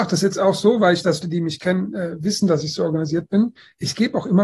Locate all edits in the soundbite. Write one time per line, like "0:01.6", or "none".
0:01.2